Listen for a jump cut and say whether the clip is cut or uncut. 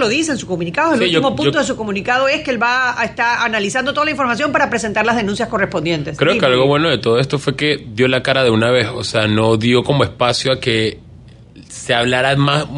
uncut